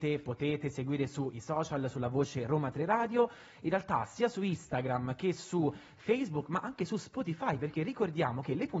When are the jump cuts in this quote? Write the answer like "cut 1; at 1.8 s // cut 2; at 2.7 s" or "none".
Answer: none